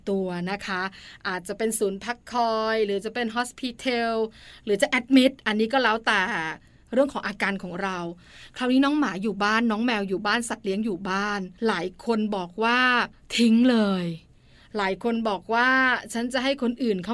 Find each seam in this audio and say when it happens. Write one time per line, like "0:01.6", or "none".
0:11.6